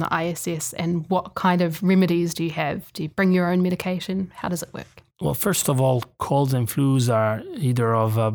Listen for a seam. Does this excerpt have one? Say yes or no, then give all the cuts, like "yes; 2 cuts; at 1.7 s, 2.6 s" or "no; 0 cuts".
no; 0 cuts